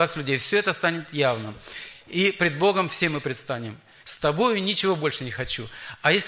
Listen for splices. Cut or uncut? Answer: cut